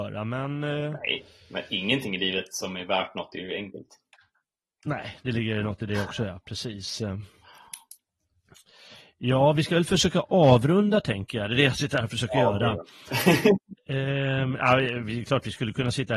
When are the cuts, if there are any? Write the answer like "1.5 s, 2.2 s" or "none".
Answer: none